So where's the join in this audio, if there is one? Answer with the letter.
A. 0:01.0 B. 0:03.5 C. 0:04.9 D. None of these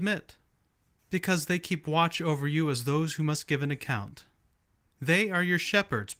A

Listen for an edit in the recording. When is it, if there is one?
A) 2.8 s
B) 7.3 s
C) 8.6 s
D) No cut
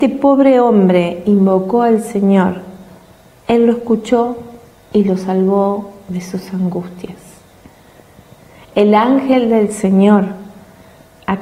D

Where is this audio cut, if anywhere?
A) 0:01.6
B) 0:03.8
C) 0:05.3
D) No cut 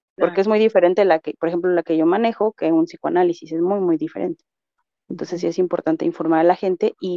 D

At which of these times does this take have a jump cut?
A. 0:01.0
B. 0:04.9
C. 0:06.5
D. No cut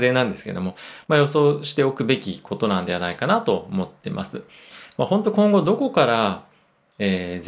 A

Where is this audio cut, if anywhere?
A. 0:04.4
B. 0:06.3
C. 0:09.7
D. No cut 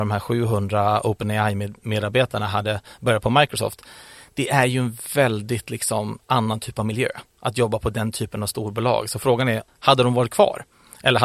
C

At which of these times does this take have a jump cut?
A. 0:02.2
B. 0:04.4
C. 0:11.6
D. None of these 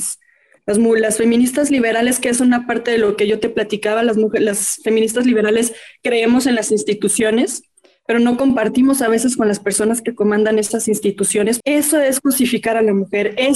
C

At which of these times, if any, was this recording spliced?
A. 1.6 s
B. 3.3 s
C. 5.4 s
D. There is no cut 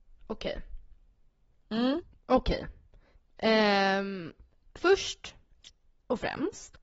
D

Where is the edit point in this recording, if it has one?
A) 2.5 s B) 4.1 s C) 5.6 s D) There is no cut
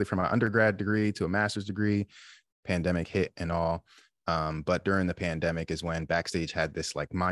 A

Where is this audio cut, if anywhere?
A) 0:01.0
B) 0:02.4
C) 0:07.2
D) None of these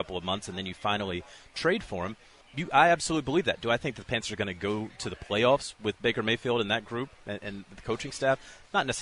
B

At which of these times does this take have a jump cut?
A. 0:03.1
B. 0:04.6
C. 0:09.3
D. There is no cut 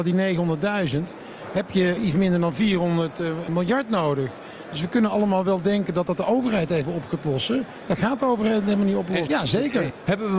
C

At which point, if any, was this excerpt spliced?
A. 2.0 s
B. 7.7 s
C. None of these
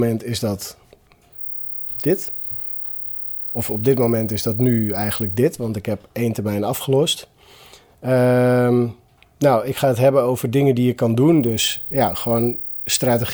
C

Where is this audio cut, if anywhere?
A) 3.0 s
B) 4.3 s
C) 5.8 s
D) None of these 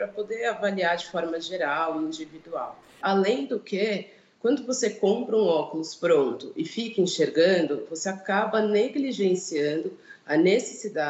A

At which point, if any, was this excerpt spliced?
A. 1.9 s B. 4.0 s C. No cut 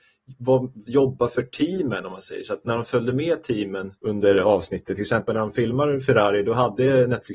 B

